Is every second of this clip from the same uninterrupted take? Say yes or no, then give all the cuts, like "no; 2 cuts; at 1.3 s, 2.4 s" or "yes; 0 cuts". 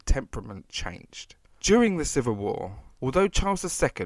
no; 2 cuts; at 1.6 s, 3.0 s